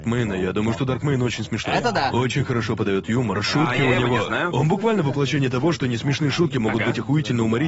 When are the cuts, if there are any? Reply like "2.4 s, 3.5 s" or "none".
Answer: none